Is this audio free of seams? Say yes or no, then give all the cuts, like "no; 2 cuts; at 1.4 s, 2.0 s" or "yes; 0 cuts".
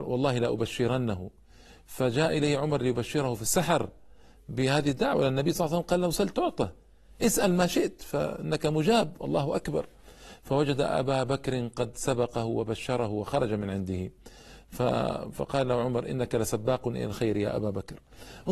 yes; 0 cuts